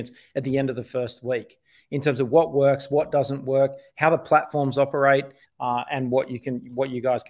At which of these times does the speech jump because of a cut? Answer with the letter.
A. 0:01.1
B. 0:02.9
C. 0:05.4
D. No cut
C